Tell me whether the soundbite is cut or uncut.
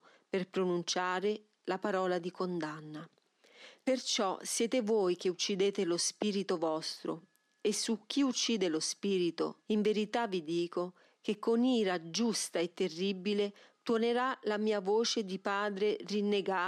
cut